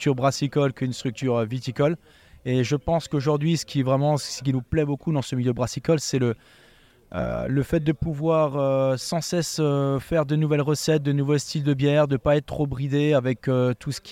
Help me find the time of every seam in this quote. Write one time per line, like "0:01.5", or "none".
none

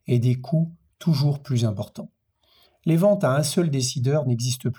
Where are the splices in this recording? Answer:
0:02.7

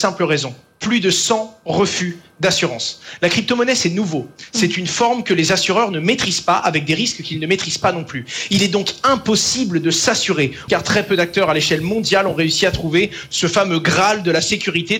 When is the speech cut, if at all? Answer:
0:10.7

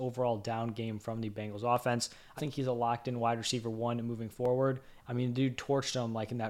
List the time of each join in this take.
0:02.4
0:05.0

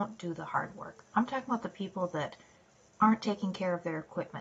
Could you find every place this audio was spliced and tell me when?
0:01.1

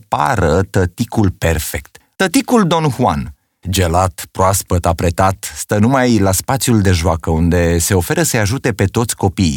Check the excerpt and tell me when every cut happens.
0:02.1
0:03.6

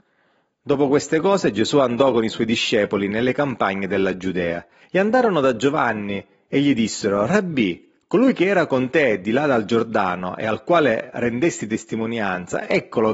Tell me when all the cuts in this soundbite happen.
0:04.8

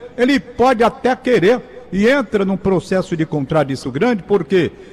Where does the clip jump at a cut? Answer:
0:03.8

